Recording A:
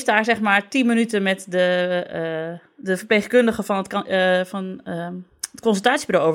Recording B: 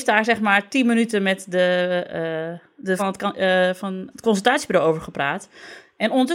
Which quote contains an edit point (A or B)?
B